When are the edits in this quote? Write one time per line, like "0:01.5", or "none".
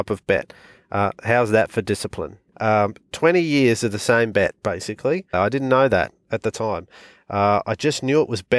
0:02.5
0:05.3